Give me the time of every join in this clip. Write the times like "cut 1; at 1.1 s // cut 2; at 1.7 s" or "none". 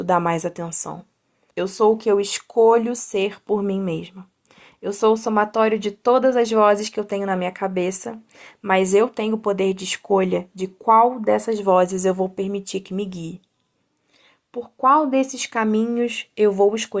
cut 1; at 1.5 s